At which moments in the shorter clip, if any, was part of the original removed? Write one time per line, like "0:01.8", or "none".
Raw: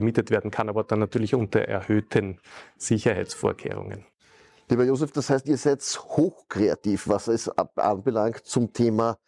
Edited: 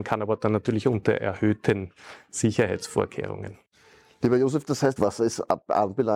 0:05.0